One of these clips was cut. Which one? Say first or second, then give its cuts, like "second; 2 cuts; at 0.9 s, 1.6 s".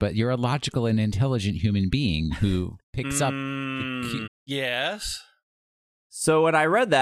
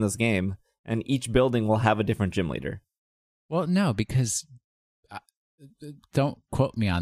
first; 2 cuts; at 2.8 s, 4.3 s